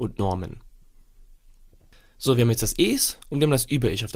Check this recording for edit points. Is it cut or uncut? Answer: uncut